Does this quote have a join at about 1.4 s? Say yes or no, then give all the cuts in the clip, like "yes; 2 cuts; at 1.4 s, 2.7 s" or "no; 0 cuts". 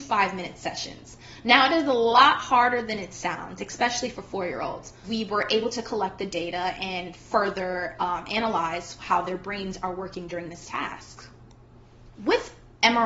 no; 1 cut; at 12.1 s